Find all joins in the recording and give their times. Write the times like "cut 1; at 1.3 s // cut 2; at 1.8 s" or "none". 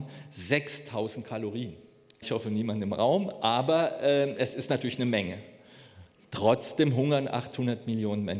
cut 1; at 2.2 s